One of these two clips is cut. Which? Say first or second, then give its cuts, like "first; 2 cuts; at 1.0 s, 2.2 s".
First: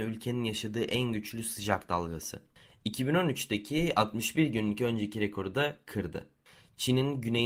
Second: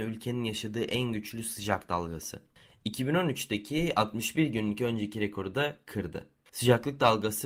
second; 1 cut; at 6.5 s